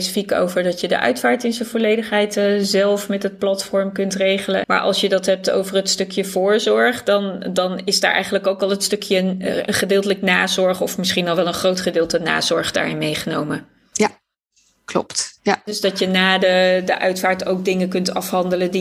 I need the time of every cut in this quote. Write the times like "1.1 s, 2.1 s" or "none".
4.6 s